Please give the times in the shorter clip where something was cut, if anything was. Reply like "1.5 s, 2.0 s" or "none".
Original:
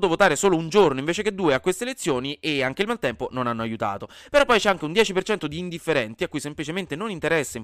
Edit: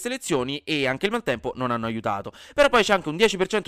none